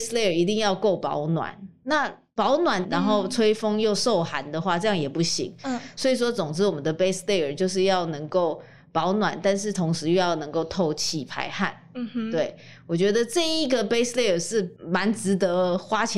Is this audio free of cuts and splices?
no; 1 cut; at 2.8 s

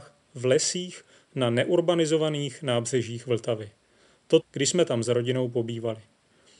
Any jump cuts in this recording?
yes; 1 cut; at 4.4 s

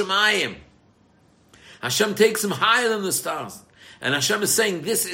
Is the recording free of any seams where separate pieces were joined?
yes; 0 cuts

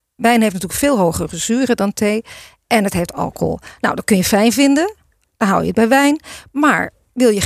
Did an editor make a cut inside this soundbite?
no; 0 cuts

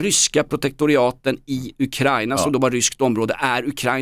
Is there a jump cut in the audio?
no; 0 cuts

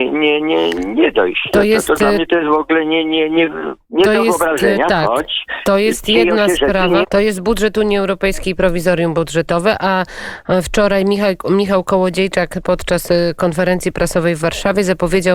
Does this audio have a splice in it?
yes; 1 cut; at 7.0 s

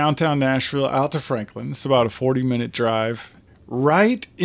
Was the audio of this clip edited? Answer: yes; 1 cut; at 3.5 s

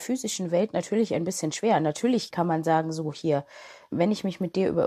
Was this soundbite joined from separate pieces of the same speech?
yes; 2 cuts; at 2.3 s, 3.9 s

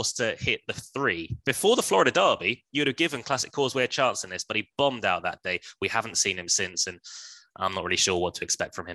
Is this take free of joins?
no; 1 cut; at 1.4 s

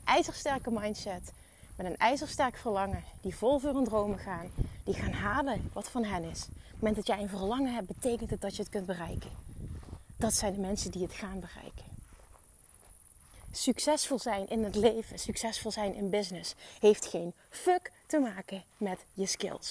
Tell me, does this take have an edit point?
no; 0 cuts

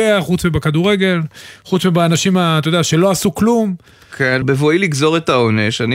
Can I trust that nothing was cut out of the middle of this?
no; 1 cut; at 4.4 s

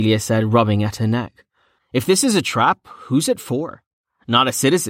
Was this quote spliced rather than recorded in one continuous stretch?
yes; 1 cut; at 1.8 s

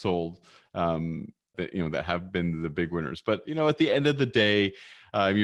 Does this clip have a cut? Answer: yes; 1 cut; at 1.5 s

